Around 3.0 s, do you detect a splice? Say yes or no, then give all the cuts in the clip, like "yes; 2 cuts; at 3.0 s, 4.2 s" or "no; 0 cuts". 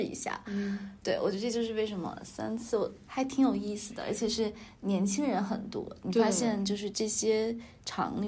yes; 2 cuts; at 3.0 s, 6.9 s